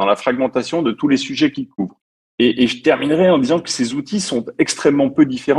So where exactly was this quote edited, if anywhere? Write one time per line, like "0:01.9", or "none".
0:02.2